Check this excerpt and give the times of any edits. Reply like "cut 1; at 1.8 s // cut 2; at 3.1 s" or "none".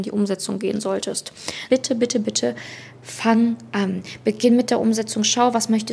cut 1; at 1.7 s